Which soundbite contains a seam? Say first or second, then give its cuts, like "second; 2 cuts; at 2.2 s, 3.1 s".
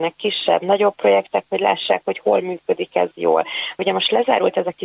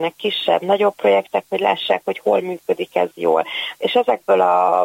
second; 1 cut; at 3.8 s